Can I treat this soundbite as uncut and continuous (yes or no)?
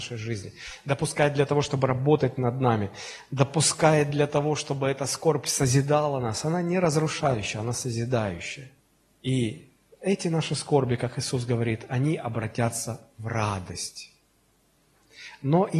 yes